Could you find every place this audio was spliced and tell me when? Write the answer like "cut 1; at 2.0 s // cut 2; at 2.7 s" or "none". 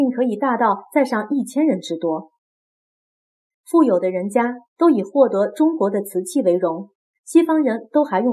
cut 1; at 3.5 s // cut 2; at 7.1 s